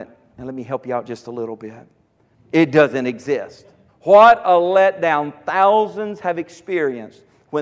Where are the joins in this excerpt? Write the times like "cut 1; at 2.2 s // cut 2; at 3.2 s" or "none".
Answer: cut 1; at 2.3 s // cut 2; at 3.9 s